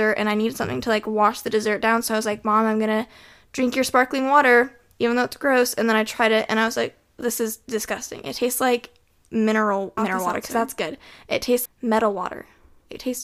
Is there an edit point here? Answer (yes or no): yes